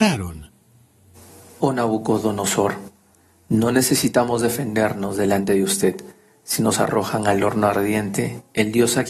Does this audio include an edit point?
no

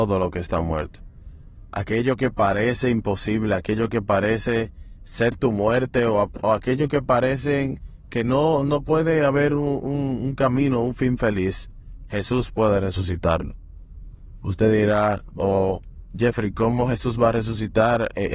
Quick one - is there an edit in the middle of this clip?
no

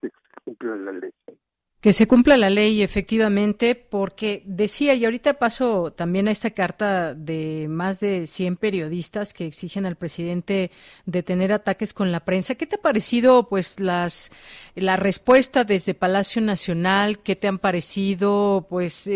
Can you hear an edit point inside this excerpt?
no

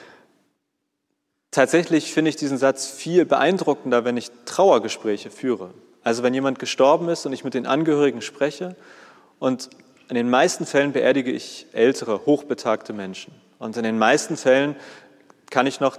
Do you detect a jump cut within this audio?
no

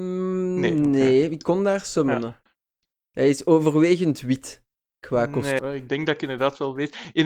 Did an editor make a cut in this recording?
yes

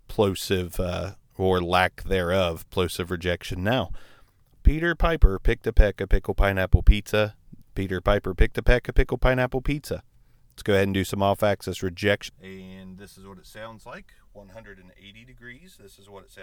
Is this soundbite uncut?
no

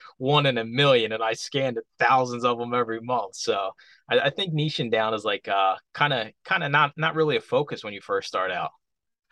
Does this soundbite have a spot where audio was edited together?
no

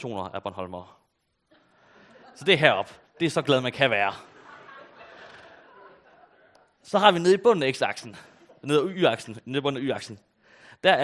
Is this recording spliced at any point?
no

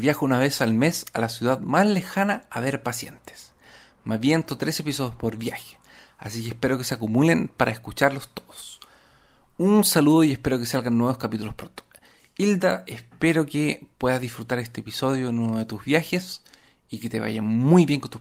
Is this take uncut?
yes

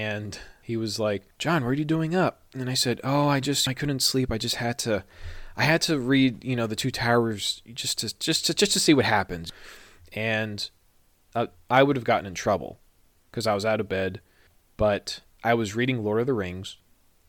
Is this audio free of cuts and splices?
no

